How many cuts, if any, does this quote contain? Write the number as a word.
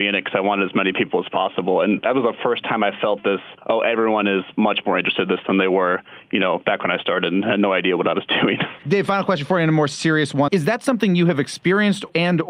one